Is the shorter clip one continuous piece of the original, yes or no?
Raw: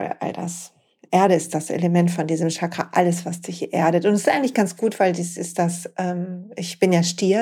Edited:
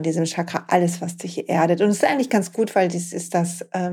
yes